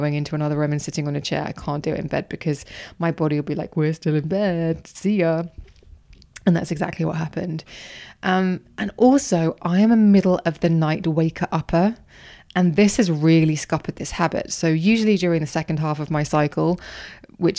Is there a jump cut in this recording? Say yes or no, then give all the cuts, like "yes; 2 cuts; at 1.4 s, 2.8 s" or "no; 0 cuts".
no; 0 cuts